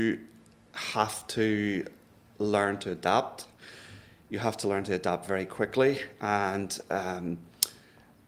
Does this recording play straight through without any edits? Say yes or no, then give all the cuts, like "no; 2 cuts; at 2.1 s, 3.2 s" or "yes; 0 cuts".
yes; 0 cuts